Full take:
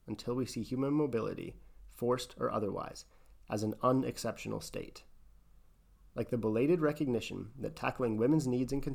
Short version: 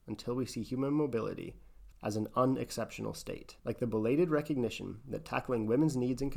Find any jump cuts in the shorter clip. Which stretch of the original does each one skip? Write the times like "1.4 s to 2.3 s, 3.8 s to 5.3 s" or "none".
1.9 s to 3.4 s, 5.1 s to 6.1 s